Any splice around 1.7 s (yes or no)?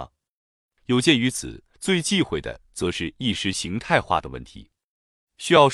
yes